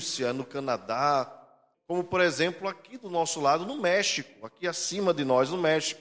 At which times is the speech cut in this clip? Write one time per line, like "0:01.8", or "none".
0:01.7

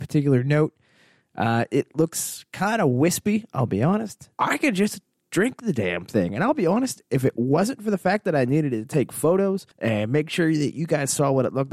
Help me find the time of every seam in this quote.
0:04.4
0:09.7

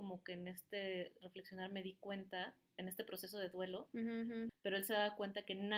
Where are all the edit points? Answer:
0:04.5

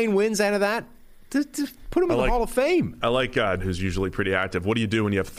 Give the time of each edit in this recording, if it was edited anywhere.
0:03.6

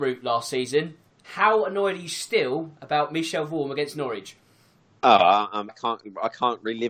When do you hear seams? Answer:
0:01.2
0:05.7

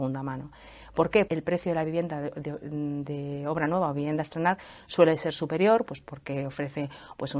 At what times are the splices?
0:01.3

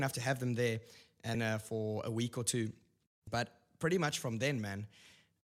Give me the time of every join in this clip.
0:01.3
0:03.3

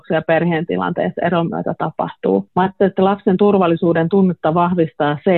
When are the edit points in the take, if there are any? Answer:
none

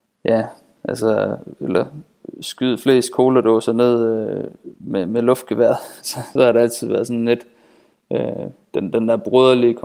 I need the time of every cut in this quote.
none

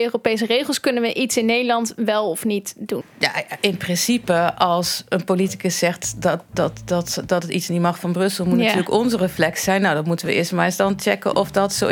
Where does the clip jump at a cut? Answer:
0:03.0

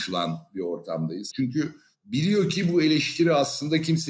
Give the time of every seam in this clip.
0:01.3

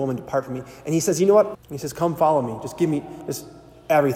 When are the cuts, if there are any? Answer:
0:01.5

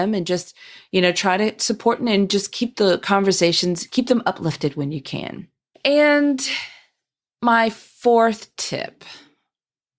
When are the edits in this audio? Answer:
0:05.7

